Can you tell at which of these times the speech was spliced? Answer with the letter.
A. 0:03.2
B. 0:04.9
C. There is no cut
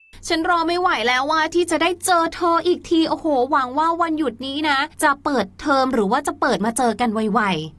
B